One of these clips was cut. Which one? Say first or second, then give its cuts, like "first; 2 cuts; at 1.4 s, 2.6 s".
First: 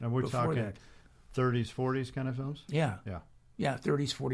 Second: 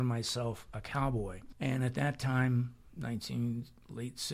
second; 1 cut; at 1.5 s